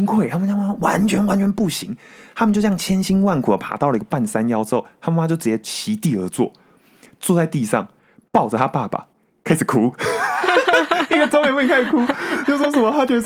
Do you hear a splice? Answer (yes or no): no